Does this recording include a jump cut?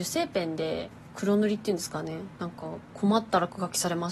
yes; 1 cut; at 1.1 s

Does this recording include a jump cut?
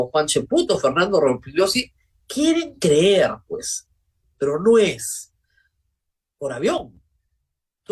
yes; 1 cut; at 6.4 s

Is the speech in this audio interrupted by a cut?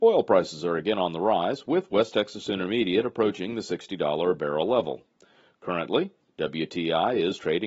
no; 0 cuts

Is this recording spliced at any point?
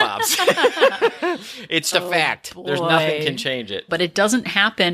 yes; 2 cuts; at 1.9 s, 3.9 s

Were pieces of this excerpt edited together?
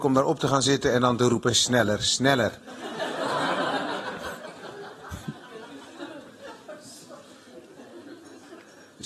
no; 0 cuts

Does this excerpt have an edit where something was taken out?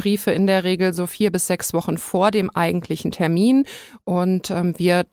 no; 0 cuts

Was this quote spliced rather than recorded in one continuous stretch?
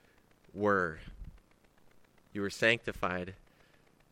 yes; 1 cut; at 2.3 s

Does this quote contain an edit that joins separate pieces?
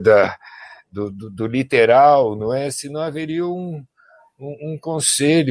no; 0 cuts

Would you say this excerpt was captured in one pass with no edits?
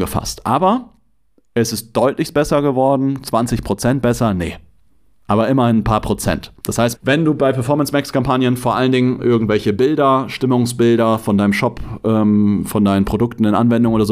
no; 1 cut; at 6.9 s

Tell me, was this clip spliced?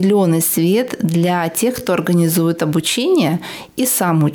no; 0 cuts

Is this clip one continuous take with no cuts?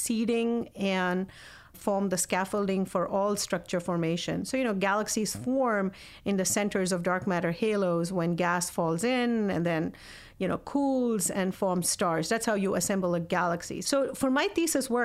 no; 2 cuts; at 1.7 s, 13.8 s

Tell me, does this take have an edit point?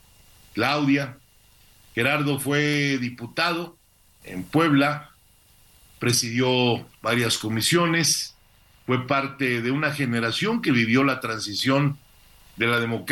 yes; 1 cut; at 4.2 s

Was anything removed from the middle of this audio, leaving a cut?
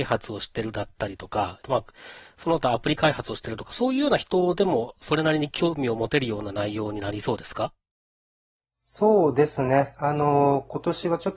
yes; 1 cut; at 1.6 s

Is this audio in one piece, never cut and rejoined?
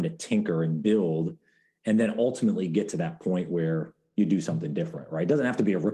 yes; 0 cuts

